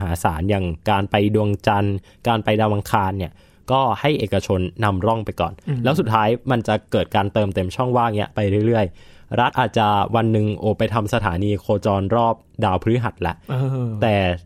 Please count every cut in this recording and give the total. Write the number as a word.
zero